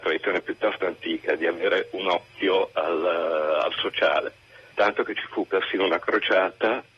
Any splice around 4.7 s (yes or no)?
yes